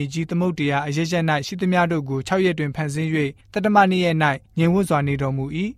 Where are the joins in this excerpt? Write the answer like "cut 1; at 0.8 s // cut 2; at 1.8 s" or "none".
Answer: none

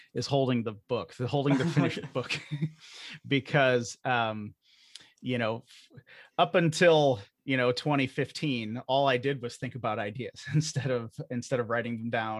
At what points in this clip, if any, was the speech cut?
cut 1; at 7.3 s

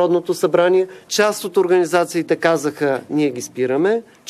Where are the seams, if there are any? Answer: cut 1; at 1.1 s

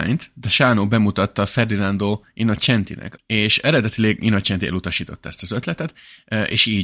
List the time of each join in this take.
cut 1; at 3.2 s

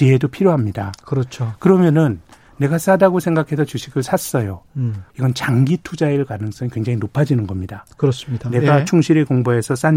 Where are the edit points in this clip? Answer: cut 1; at 5.1 s

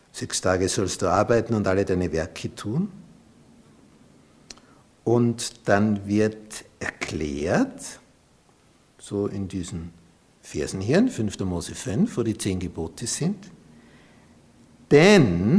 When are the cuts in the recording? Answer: none

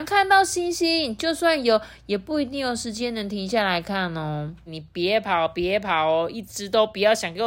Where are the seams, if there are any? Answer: cut 1; at 4.7 s

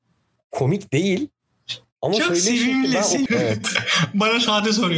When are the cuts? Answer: cut 1; at 3.3 s

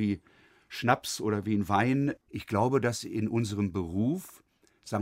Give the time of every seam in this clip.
cut 1; at 2.2 s

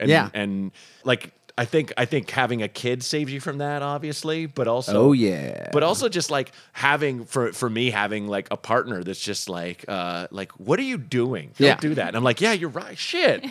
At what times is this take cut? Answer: cut 1; at 1.0 s

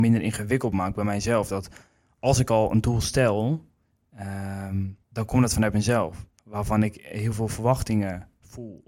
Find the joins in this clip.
cut 1; at 5.0 s // cut 2; at 6.4 s

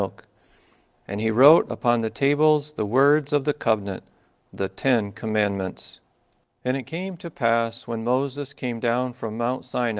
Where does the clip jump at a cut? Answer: cut 1; at 1.0 s

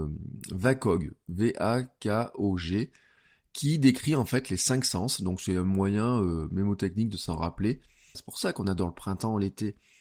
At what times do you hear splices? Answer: cut 1; at 8.1 s

